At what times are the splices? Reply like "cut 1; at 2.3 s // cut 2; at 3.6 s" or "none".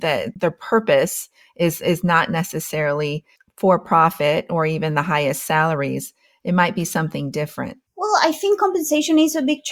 none